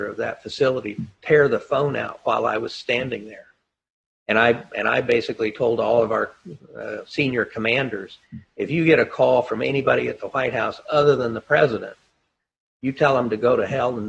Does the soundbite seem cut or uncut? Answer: uncut